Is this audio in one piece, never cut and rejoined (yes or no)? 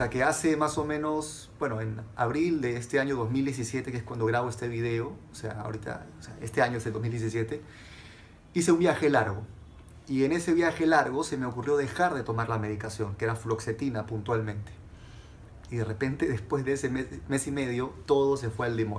no